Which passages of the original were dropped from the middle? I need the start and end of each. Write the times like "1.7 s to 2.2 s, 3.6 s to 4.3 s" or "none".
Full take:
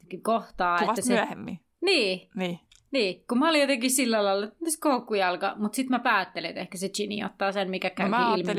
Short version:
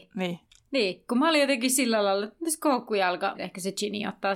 5.5 s to 6.5 s